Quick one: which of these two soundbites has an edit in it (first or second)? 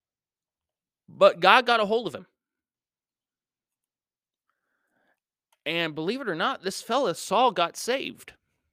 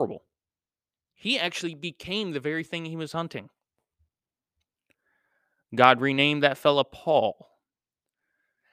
second